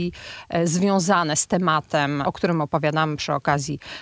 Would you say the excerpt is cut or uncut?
cut